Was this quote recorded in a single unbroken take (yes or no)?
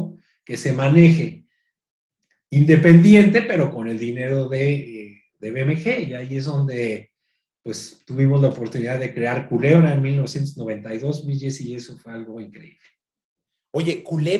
yes